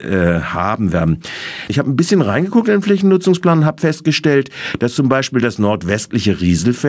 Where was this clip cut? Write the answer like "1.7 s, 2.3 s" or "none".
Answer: 1.7 s